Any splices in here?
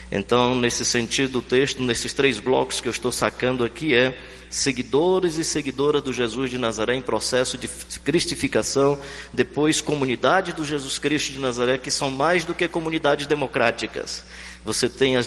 no; 0 cuts

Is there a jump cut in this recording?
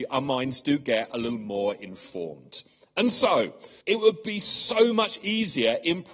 yes; 1 cut; at 3.8 s

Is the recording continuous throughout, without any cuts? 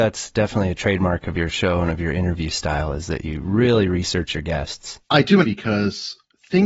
no; 1 cut; at 5.4 s

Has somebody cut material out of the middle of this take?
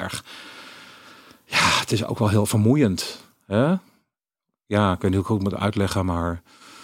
no; 0 cuts

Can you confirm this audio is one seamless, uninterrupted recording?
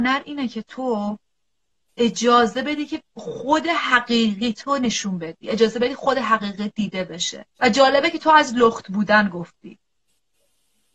no; 1 cut; at 7.5 s

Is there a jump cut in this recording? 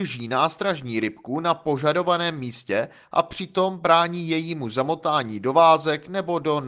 no; 0 cuts

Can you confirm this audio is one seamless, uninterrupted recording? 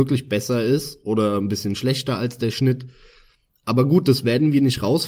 yes; 0 cuts

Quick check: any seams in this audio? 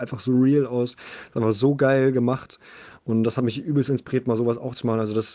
no; 0 cuts

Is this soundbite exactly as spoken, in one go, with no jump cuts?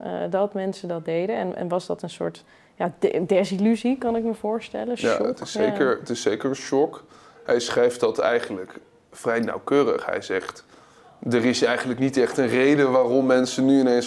yes; 0 cuts

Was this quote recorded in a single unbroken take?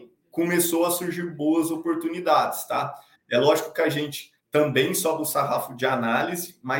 no; 2 cuts; at 3.2 s, 4.4 s

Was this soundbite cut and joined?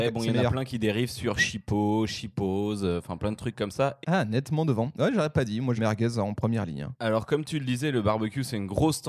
yes; 2 cuts; at 4.0 s, 5.8 s

